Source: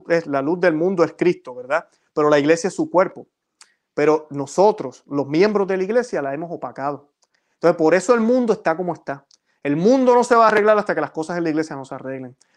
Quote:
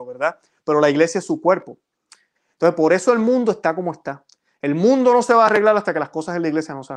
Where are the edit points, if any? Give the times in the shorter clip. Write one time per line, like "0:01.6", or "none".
0:02.3